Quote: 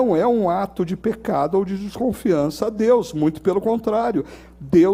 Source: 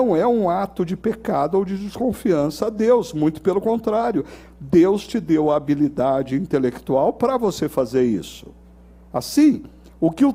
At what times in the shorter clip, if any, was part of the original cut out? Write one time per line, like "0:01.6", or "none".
none